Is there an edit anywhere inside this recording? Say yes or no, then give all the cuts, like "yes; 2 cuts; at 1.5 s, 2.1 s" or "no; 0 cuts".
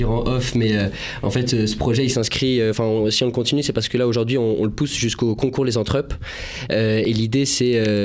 no; 0 cuts